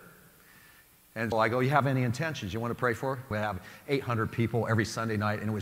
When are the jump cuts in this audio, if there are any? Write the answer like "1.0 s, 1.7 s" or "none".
1.3 s, 3.3 s